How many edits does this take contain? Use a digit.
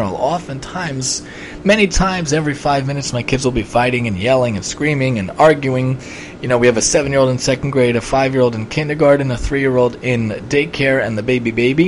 0